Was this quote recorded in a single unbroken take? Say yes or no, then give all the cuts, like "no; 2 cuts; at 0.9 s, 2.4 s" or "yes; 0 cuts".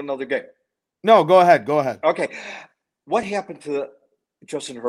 yes; 0 cuts